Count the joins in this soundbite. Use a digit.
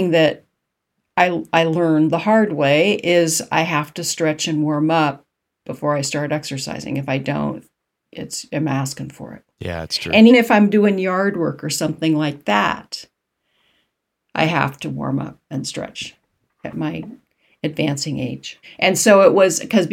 2